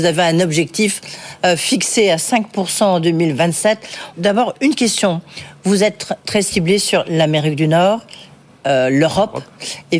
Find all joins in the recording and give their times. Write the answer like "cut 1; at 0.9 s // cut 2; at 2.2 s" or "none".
cut 1; at 4.1 s